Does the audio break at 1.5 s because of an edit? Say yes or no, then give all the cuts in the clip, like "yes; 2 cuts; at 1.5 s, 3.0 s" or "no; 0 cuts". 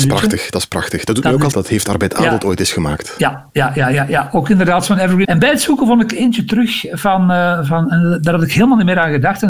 yes; 2 cuts; at 1.5 s, 5.2 s